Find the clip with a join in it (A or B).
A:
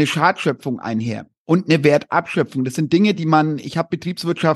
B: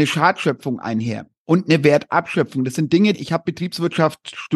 B